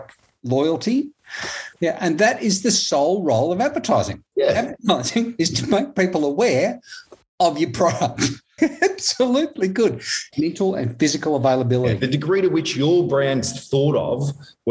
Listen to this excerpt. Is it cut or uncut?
cut